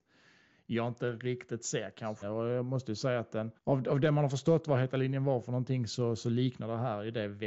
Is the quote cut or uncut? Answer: cut